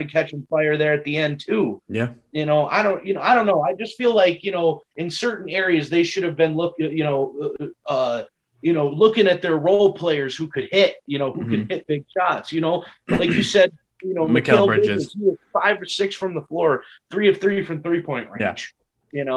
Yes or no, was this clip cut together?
no